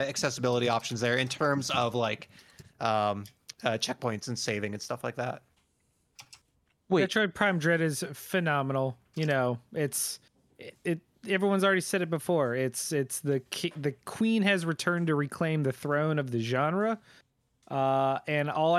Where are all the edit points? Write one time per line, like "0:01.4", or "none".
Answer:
0:09.1